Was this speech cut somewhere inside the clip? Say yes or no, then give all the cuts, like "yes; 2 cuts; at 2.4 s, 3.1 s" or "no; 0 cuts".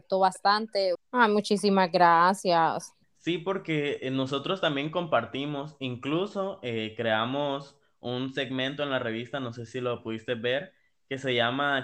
yes; 2 cuts; at 1.0 s, 3.0 s